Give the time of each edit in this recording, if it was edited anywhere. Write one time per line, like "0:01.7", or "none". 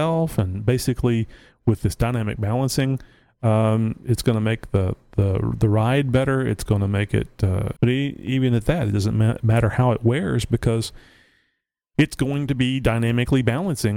0:07.8